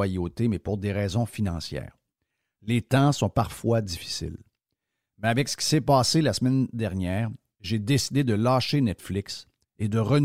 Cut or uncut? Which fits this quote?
uncut